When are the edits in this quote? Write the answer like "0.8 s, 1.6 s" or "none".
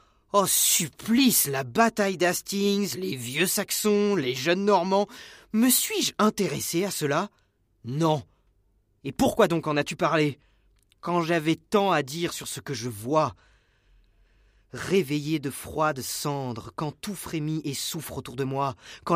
none